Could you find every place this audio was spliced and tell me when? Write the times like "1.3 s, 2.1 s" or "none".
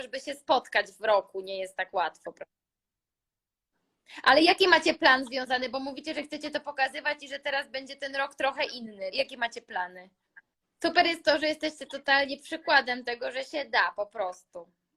9.1 s, 10.6 s